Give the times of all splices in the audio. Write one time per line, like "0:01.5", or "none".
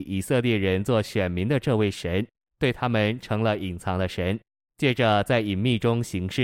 0:02.4